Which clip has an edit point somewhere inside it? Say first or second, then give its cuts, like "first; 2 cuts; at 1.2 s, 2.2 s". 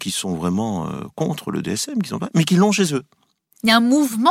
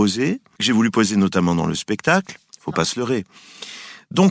second; 1 cut; at 2.5 s